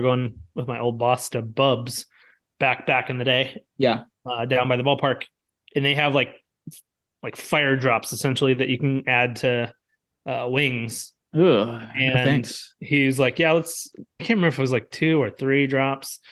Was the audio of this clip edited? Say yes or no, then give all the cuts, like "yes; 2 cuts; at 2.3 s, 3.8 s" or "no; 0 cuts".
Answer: no; 0 cuts